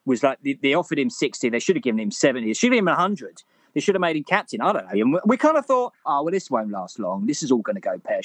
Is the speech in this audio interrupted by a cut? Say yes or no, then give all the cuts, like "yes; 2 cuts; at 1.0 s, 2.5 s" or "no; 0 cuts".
yes; 2 cuts; at 4.9 s, 6.0 s